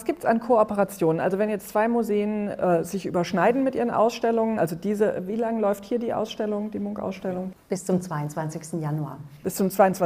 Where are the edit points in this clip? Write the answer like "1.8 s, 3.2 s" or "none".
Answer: none